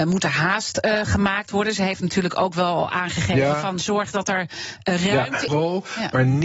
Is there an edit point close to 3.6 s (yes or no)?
no